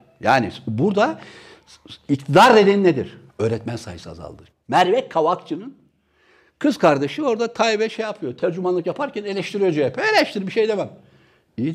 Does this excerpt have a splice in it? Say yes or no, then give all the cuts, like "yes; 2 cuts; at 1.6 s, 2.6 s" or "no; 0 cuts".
yes; 2 cuts; at 3.3 s, 4.5 s